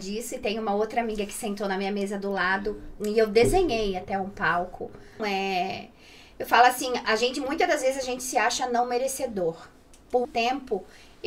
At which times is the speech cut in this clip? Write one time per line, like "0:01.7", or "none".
0:05.2
0:07.0
0:10.2